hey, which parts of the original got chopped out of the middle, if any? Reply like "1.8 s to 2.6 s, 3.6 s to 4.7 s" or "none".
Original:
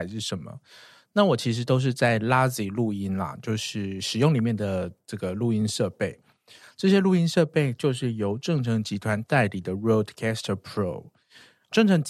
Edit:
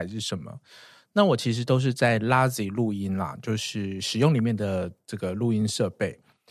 none